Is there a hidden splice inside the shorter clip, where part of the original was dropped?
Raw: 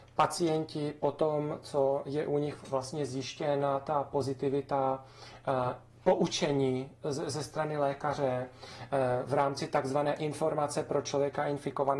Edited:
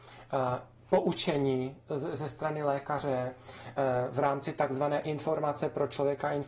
no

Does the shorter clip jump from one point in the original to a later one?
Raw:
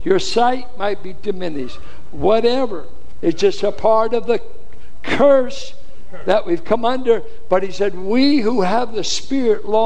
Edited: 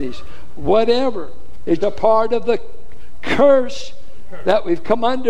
yes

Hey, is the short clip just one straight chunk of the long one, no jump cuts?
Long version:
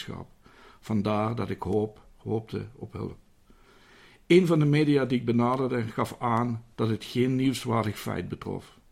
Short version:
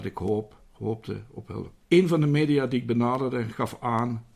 no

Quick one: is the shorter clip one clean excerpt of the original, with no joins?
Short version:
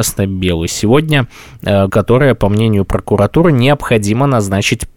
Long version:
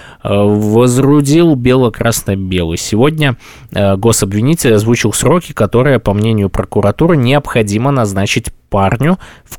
no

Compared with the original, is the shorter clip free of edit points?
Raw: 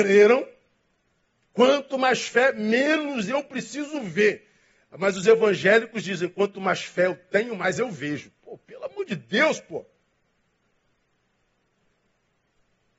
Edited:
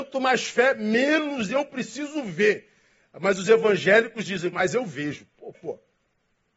no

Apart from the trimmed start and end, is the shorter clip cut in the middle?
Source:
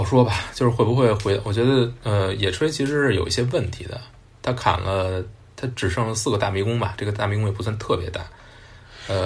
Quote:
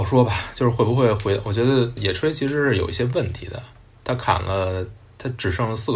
yes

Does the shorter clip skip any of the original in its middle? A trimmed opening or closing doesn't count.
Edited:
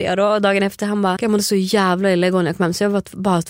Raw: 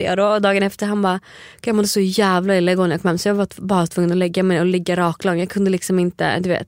yes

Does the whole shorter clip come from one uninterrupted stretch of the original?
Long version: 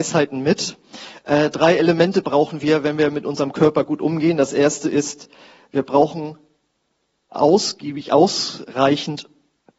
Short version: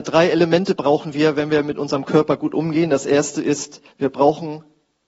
no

